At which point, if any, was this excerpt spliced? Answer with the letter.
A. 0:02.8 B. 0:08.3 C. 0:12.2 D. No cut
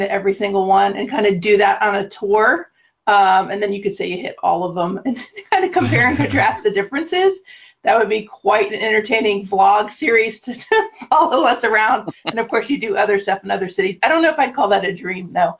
D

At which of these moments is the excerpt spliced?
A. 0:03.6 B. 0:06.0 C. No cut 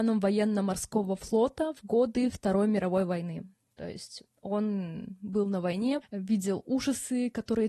B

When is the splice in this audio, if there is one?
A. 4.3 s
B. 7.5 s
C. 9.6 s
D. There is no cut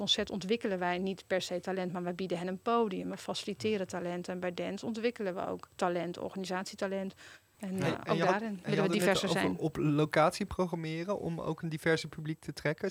B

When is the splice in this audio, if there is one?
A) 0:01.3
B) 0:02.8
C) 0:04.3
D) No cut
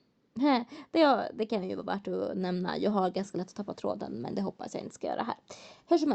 D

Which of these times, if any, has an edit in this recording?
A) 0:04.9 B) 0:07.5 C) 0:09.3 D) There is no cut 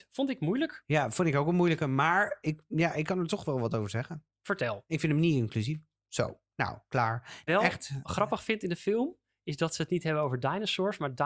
B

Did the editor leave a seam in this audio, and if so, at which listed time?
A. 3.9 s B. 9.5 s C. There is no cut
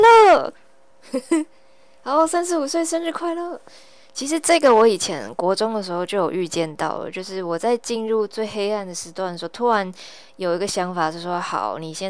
C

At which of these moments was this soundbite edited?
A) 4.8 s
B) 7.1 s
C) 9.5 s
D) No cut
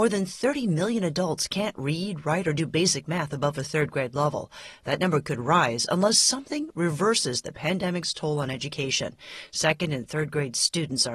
D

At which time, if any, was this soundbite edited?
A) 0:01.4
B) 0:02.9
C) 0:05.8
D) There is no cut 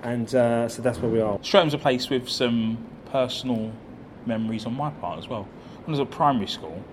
A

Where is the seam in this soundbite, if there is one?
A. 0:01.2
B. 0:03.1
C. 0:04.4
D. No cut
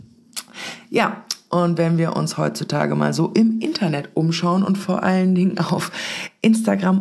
D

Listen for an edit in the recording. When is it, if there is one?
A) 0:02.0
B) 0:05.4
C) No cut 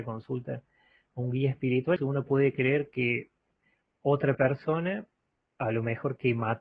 A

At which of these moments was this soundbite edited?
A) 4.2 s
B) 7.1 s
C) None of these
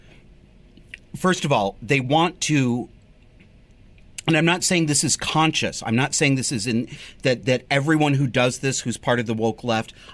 C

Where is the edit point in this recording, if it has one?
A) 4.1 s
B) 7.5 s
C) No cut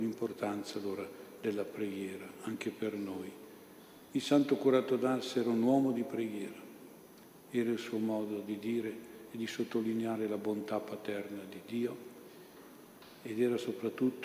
B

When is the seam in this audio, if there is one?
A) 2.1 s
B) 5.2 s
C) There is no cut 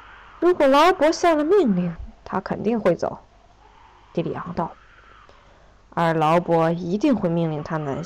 C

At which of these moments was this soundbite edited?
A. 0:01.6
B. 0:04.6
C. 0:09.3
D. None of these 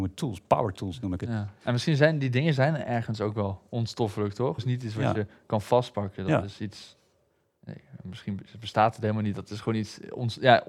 B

